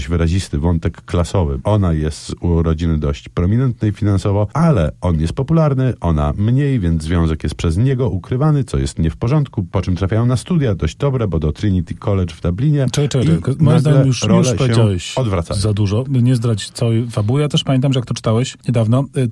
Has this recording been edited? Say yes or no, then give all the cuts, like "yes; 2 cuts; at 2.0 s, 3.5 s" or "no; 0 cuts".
yes; 1 cut; at 1.6 s